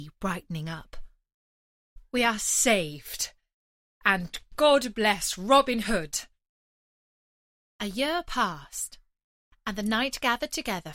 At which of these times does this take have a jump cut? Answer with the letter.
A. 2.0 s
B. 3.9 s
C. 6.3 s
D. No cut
D